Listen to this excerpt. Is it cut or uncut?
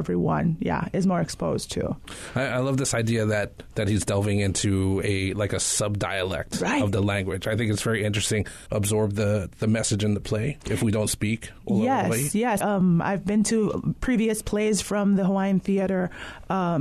cut